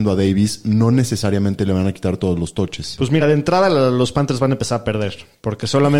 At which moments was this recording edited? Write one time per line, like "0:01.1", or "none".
none

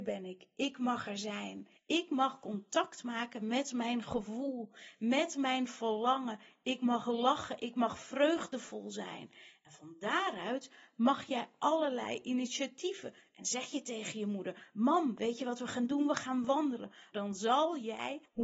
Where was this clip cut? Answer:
0:17.1

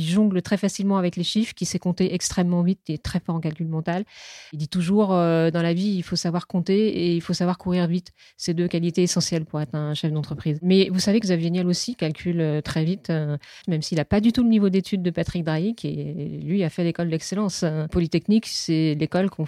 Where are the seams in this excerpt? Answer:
0:13.6

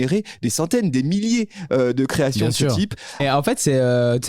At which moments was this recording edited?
0:03.2

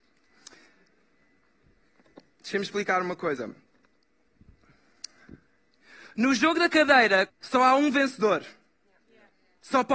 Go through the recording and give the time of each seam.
0:07.3

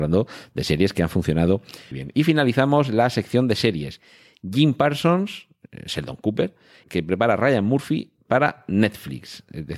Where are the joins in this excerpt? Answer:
0:01.9
0:06.8

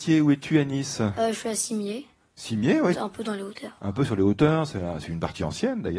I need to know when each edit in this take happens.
0:02.9

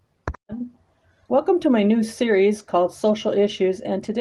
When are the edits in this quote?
0:01.2

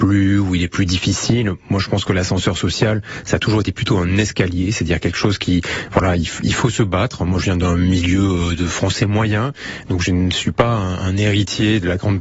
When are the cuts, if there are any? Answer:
none

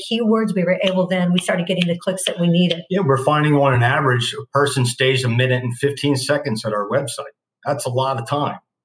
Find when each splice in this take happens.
none

